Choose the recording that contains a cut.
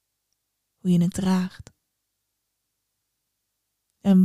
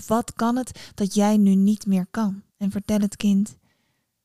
second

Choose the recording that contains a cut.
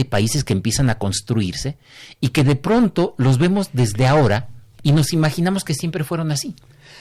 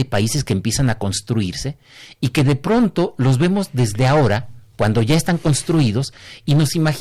first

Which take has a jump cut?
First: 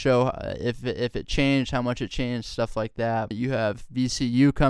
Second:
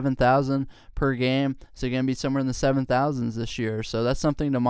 first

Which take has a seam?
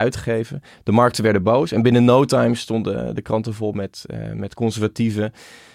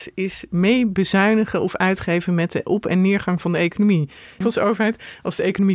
second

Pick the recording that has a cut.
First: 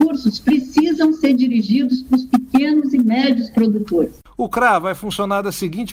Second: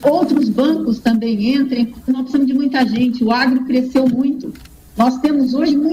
second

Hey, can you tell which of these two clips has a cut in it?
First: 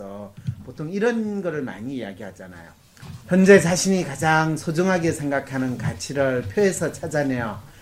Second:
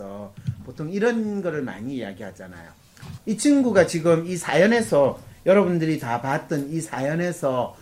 second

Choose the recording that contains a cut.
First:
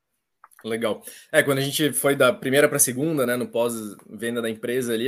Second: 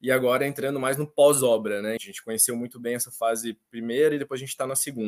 second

